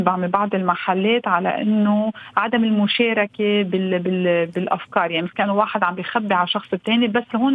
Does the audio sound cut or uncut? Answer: uncut